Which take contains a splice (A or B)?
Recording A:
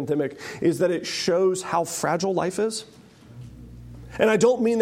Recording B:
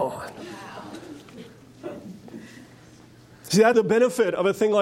B